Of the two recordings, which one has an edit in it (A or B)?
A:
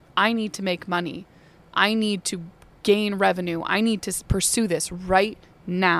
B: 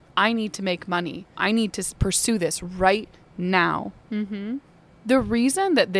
B